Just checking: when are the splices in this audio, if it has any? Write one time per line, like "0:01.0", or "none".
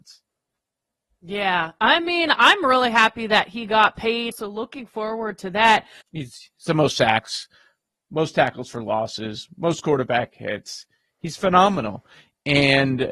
0:04.3
0:06.0